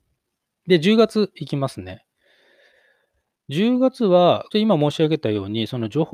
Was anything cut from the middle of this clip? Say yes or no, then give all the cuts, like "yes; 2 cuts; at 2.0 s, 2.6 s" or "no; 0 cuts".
yes; 1 cut; at 4.5 s